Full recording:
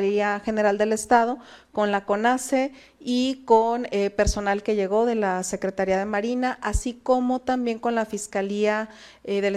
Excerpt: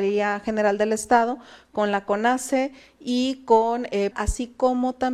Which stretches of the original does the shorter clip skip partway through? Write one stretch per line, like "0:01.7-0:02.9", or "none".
0:04.1-0:06.6